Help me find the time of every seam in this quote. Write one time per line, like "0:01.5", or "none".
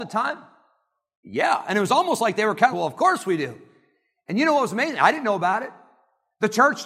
0:02.7